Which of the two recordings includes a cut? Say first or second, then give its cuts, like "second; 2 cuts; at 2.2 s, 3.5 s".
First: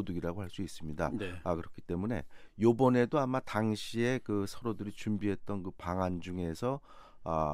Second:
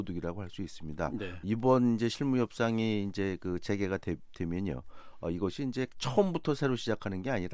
second; 1 cut; at 1.4 s